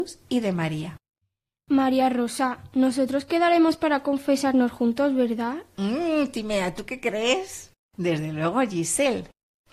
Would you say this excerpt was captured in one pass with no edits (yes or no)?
no